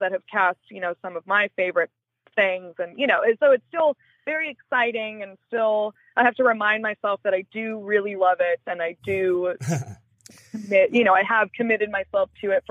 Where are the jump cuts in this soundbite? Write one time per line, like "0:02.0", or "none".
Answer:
0:08.2